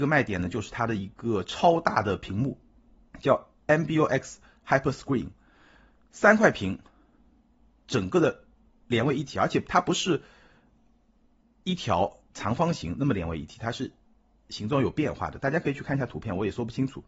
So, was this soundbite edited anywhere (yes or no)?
no